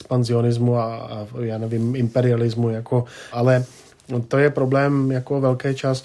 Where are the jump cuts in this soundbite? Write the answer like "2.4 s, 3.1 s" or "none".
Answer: 3.3 s

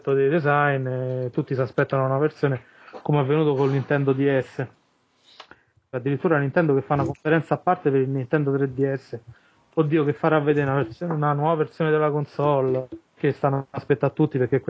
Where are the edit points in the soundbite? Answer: 5.9 s

